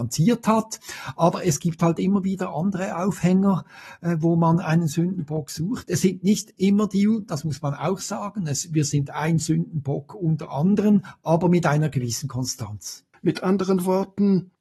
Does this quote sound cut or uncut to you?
cut